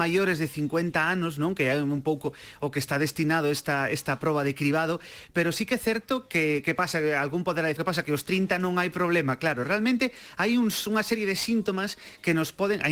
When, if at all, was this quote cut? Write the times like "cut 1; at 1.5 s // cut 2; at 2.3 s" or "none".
cut 1; at 7.8 s

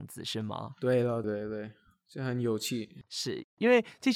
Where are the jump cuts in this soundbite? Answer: cut 1; at 1.2 s

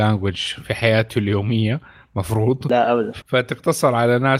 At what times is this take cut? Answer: cut 1; at 3.2 s

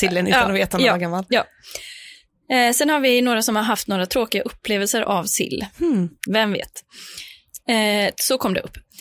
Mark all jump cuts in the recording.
cut 1; at 6.3 s // cut 2; at 7.6 s

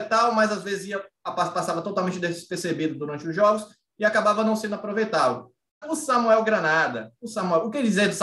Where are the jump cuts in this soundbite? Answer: cut 1; at 5.8 s

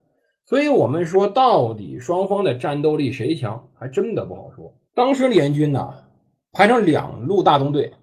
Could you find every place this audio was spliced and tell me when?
cut 1; at 4.9 s

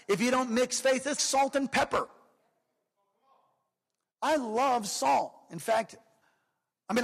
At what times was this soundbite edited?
cut 1; at 1.2 s

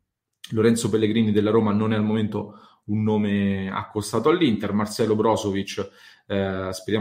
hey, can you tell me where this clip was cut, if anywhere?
none

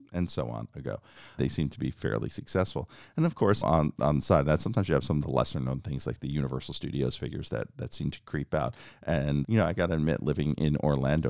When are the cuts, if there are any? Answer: cut 1; at 1.4 s // cut 2; at 3.6 s // cut 3; at 9.4 s

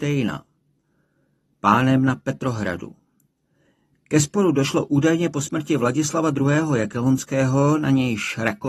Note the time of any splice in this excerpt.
none

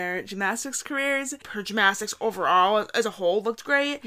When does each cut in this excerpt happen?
cut 1; at 1.4 s

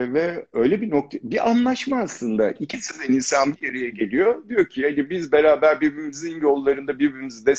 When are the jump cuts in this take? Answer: none

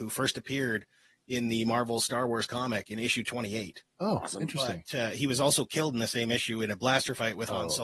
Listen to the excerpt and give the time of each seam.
none

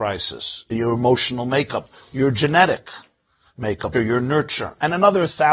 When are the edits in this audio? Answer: cut 1; at 3.9 s

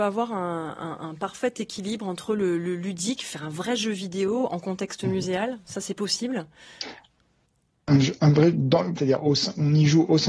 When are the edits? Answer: cut 1; at 9.0 s

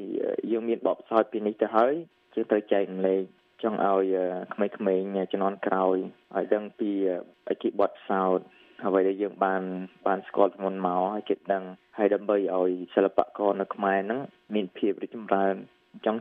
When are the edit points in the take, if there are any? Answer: none

